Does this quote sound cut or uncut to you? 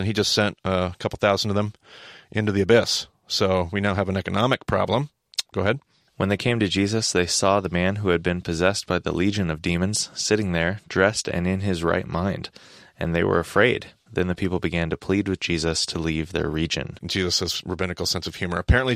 cut